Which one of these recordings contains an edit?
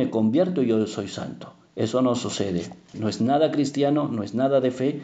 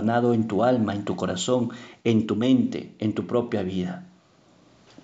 first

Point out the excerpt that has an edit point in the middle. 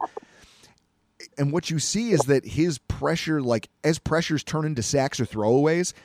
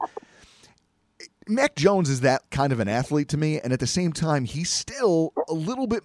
first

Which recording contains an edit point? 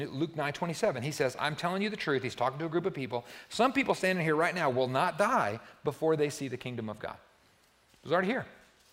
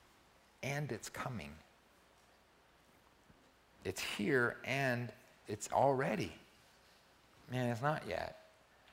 second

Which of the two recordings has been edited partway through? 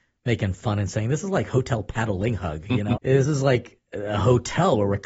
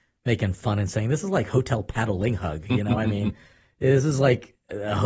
first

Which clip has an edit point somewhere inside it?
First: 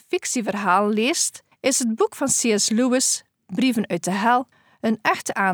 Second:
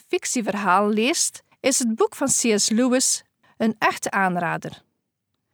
second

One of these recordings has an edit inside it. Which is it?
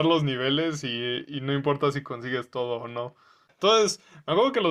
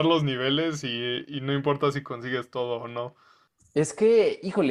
first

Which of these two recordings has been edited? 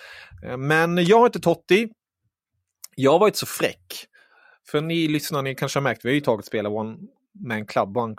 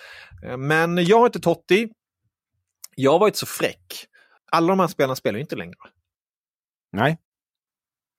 second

